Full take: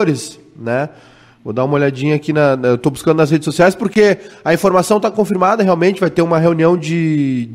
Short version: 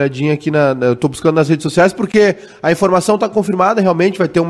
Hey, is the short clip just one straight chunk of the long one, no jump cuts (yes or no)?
yes